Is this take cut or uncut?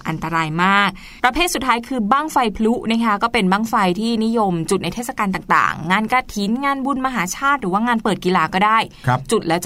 cut